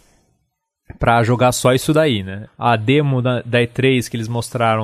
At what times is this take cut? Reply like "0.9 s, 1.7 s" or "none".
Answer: 2.5 s